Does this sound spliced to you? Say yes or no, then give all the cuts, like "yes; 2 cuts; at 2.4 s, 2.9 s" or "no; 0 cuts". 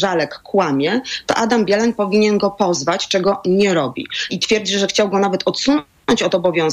yes; 1 cut; at 4.3 s